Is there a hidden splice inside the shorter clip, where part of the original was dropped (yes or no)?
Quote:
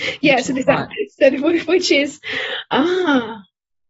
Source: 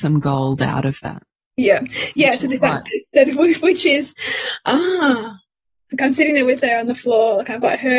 no